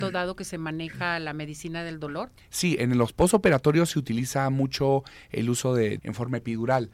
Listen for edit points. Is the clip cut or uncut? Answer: cut